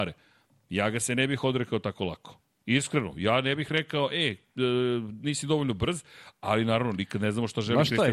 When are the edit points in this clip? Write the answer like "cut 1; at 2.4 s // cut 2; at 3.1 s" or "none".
none